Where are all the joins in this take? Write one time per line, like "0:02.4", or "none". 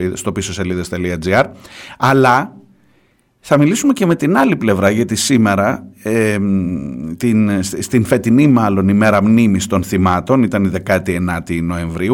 none